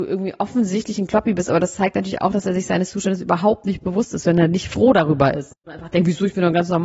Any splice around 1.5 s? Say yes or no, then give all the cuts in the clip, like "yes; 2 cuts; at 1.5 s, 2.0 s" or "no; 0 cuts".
no; 1 cut; at 5.5 s